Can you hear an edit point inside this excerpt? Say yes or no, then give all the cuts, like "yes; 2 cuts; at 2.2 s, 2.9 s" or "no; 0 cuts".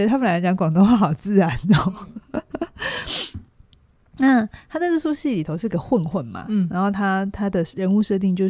no; 0 cuts